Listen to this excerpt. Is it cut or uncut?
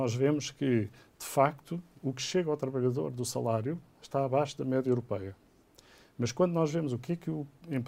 uncut